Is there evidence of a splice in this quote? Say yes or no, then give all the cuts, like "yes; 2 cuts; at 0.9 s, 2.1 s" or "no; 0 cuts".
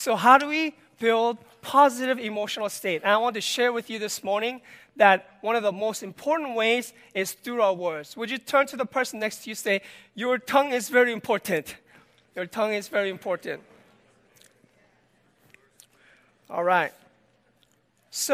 no; 0 cuts